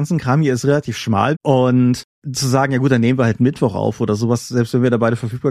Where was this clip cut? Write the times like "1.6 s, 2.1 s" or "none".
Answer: 1.3 s